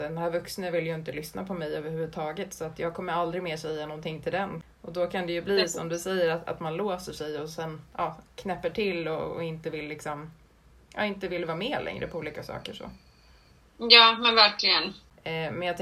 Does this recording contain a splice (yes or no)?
no